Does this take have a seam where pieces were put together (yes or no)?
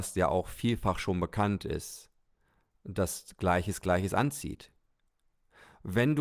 no